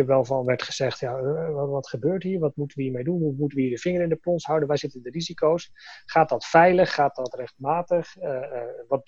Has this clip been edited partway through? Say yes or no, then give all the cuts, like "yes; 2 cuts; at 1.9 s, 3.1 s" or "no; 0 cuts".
no; 0 cuts